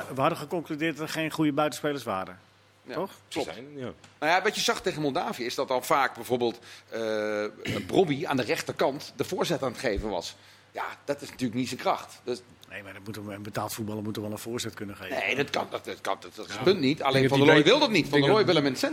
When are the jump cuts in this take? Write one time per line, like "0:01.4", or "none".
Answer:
0:16.2